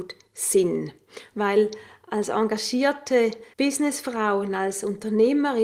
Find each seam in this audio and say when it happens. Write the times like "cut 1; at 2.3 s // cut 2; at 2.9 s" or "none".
cut 1; at 1.3 s // cut 2; at 3.5 s